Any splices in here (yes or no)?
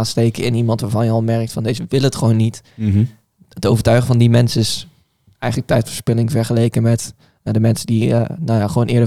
no